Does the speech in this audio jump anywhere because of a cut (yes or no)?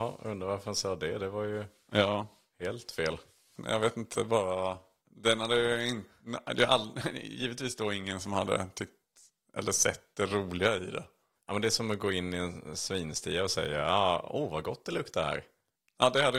yes